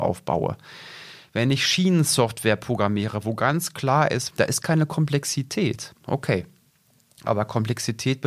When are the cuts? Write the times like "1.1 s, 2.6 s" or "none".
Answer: 4.3 s, 6.0 s